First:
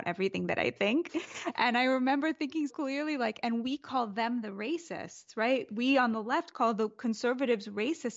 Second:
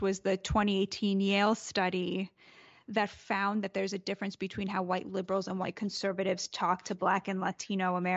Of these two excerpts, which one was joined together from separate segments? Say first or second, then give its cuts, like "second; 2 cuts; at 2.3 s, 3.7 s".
first; 1 cut; at 2.7 s